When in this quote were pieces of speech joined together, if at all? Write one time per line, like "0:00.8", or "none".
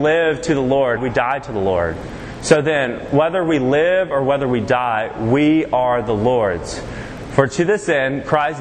0:01.0